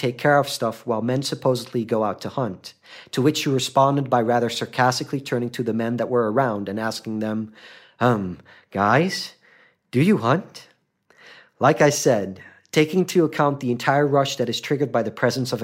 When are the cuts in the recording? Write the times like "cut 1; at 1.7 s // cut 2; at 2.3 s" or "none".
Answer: none